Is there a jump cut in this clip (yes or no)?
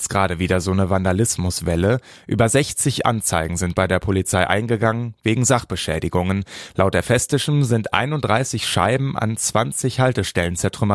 yes